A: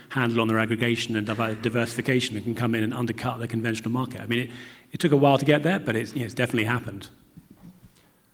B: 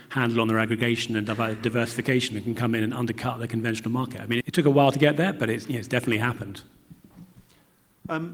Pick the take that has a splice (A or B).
B